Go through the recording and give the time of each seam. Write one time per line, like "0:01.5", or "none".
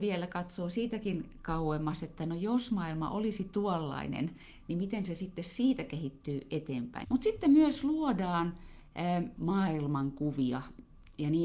0:07.0
0:09.4